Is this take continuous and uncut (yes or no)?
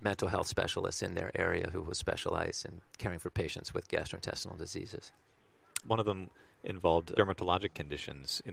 no